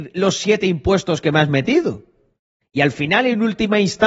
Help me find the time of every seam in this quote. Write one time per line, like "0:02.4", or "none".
0:02.6